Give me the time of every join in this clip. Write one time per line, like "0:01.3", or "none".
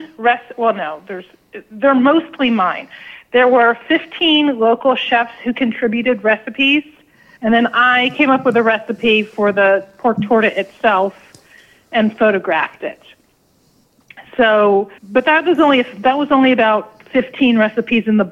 0:07.4
0:15.0